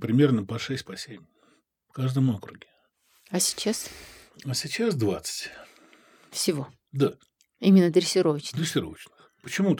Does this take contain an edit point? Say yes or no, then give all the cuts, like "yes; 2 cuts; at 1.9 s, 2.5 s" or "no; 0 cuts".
no; 0 cuts